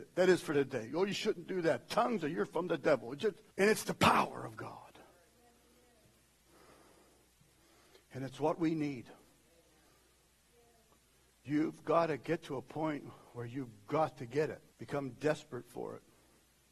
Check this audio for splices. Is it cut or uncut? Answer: cut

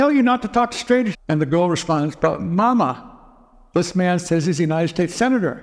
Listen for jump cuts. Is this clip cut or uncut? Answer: cut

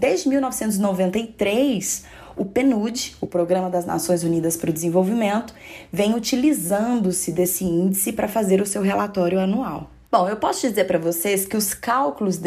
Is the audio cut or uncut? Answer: uncut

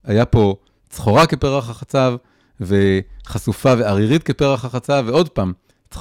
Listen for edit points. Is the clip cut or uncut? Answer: uncut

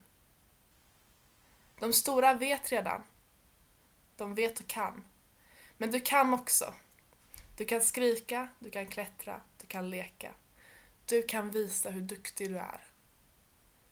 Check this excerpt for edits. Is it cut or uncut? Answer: uncut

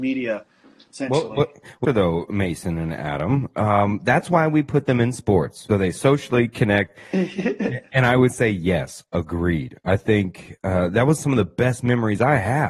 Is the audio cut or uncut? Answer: cut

